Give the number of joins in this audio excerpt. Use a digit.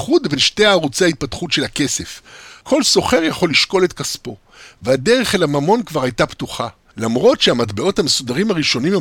2